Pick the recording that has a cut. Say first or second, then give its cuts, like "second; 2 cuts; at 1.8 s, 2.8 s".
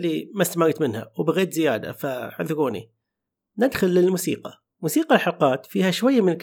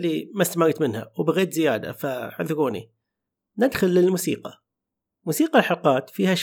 first; 1 cut; at 4.7 s